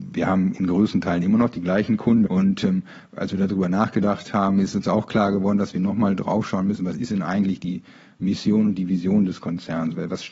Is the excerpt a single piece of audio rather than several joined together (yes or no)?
no